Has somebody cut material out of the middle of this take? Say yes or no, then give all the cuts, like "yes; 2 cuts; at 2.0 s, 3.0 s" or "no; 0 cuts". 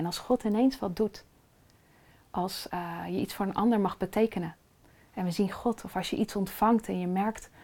no; 0 cuts